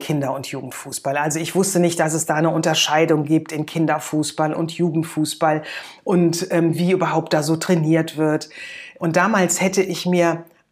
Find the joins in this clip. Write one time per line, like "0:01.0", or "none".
0:09.0